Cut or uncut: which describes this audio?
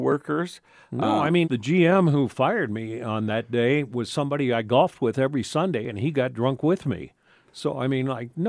cut